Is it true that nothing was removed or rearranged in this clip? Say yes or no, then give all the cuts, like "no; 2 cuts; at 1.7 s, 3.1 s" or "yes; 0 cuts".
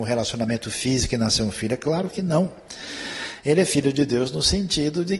yes; 0 cuts